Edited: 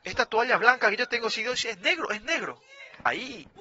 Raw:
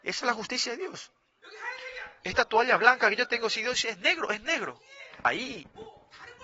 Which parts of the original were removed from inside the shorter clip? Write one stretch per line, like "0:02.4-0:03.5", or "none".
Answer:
none